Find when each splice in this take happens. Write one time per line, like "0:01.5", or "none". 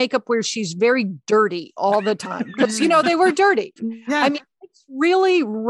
0:03.8